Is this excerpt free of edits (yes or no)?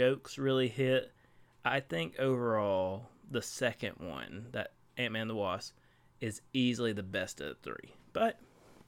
yes